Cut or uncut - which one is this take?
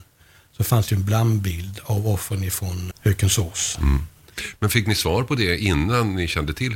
cut